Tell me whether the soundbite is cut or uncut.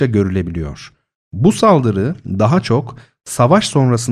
uncut